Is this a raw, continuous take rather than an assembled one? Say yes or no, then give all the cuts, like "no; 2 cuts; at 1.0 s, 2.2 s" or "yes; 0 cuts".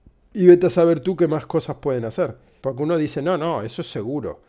no; 1 cut; at 2.6 s